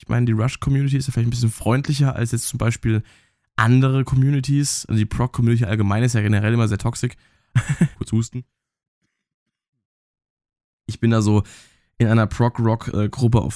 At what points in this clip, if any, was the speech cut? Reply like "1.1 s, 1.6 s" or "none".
7.9 s